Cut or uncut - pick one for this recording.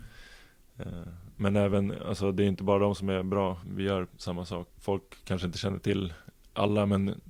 cut